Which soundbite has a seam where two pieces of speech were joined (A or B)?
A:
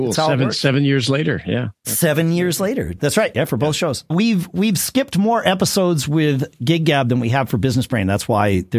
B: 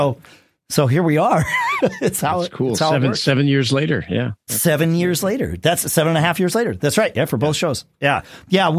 A